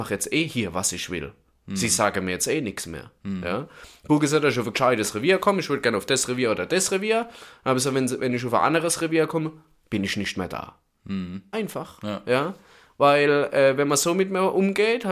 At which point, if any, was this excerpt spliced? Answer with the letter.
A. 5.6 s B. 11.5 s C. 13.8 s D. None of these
B